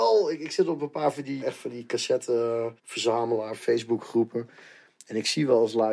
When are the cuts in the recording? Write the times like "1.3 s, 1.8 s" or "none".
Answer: 1.4 s, 2.8 s